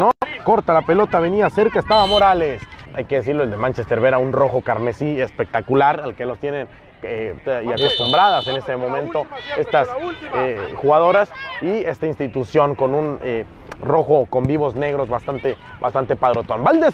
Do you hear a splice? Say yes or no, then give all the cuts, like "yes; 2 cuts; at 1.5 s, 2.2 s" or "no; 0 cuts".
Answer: yes; 2 cuts; at 2.8 s, 7.4 s